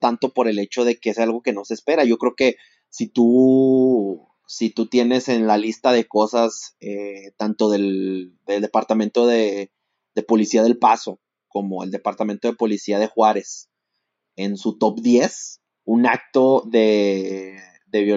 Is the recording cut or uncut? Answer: uncut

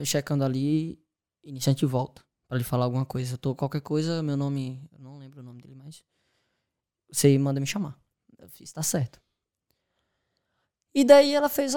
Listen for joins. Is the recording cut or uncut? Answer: uncut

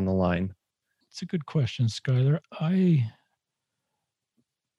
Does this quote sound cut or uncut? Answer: cut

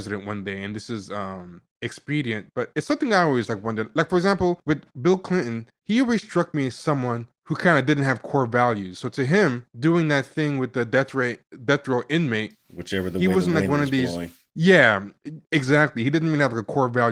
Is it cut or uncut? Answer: uncut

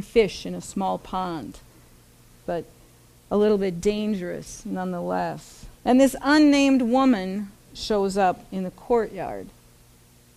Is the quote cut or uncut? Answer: cut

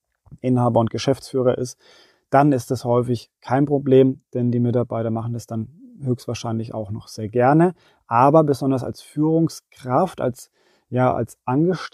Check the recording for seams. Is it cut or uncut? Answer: uncut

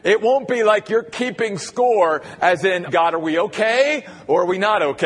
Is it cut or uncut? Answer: cut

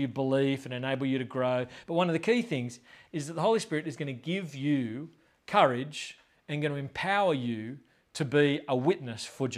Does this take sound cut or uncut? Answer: uncut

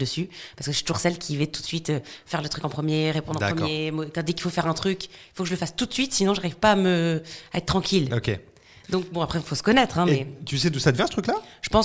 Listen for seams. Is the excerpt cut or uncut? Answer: uncut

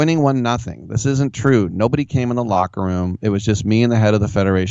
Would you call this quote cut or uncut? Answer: uncut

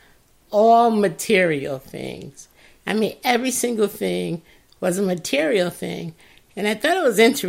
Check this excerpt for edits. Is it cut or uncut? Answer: cut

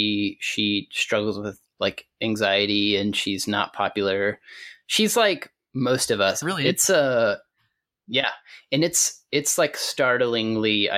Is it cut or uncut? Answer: cut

